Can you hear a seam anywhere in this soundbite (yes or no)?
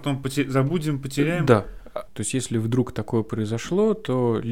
yes